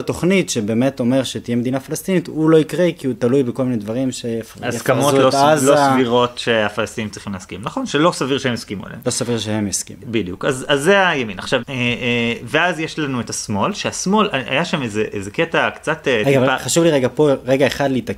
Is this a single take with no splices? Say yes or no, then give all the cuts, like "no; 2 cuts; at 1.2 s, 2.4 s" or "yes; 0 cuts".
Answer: no; 1 cut; at 11.6 s